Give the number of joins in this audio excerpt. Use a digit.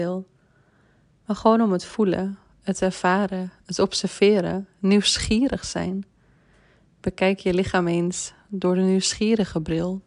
0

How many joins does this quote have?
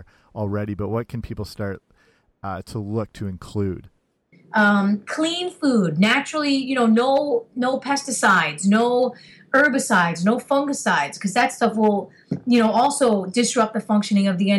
1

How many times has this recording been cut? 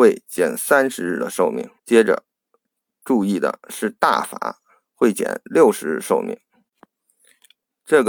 2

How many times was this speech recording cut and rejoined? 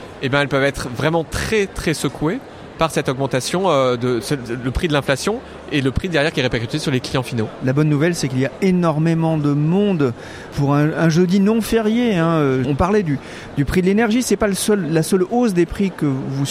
2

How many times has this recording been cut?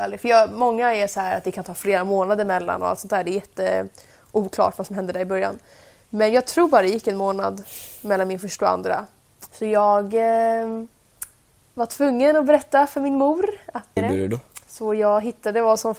2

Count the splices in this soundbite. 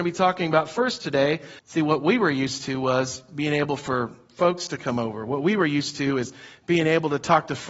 1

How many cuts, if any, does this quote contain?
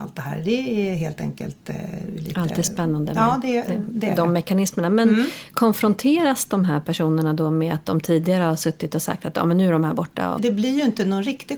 1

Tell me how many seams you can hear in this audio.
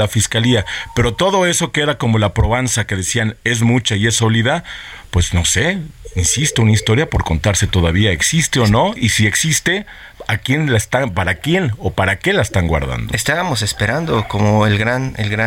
1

